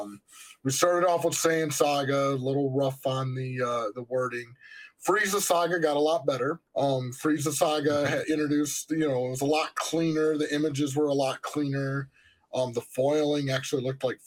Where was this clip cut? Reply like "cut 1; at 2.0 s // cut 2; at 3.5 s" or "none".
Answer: cut 1; at 6.7 s

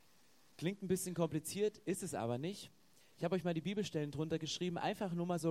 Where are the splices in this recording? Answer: none

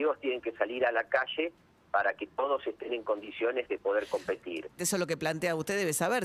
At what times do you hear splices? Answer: cut 1; at 4.8 s

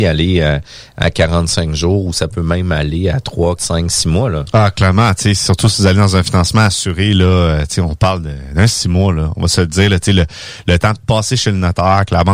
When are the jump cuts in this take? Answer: cut 1; at 3.6 s

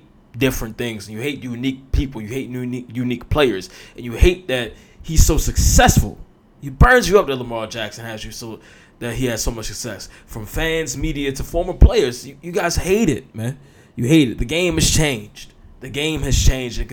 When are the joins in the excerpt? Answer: none

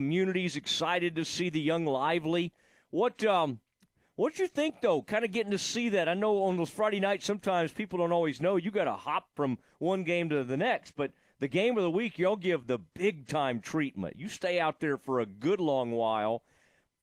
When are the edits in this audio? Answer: none

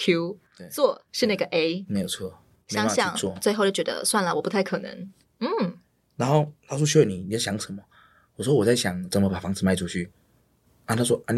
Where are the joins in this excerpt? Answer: cut 1; at 2.6 s // cut 2; at 5.3 s

